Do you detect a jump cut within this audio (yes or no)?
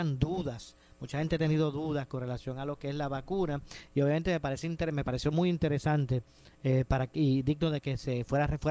no